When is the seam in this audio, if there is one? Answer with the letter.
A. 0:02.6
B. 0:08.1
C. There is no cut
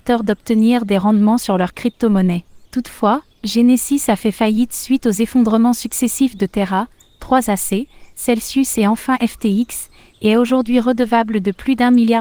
A